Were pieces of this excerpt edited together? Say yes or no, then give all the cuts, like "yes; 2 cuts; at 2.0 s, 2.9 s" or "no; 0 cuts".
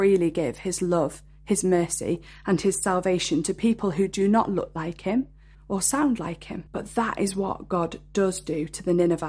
yes; 2 cuts; at 5.5 s, 6.7 s